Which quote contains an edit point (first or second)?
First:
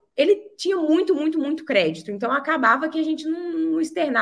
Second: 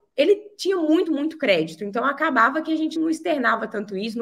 second